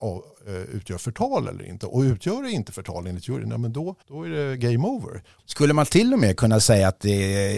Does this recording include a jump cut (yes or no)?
yes